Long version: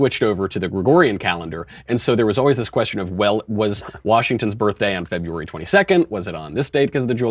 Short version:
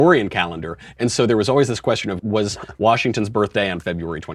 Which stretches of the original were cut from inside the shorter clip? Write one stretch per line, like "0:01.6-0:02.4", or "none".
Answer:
0:03.1-0:03.4